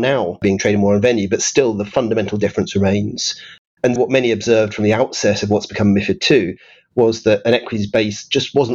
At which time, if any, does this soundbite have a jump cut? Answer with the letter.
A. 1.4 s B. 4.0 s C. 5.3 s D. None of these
B